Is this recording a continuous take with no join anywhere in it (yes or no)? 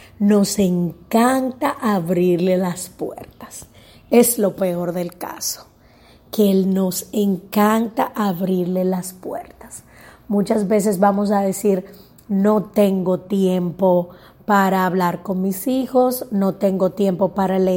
yes